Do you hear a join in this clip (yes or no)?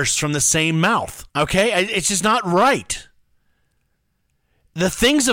yes